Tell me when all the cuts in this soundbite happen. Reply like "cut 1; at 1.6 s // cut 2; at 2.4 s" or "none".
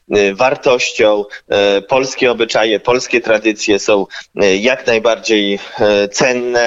none